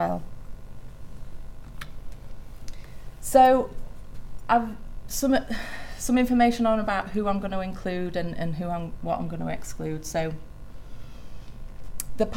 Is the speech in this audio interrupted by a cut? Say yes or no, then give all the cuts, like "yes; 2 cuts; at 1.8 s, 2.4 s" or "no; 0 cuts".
no; 0 cuts